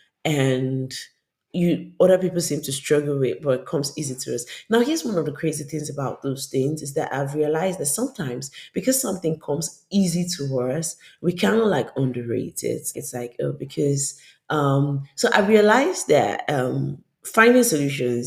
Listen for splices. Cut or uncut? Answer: cut